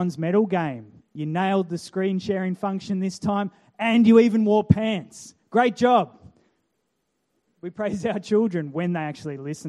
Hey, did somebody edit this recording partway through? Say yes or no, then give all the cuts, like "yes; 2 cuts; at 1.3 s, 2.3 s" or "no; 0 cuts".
yes; 2 cuts; at 1.0 s, 7.5 s